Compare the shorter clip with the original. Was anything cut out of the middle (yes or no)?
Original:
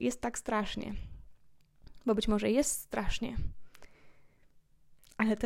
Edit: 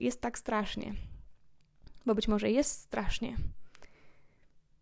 no